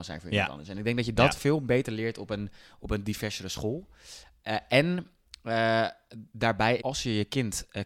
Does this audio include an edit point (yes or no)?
yes